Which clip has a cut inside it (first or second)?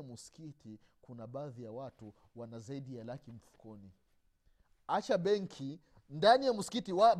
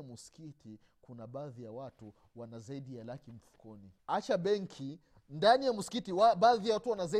second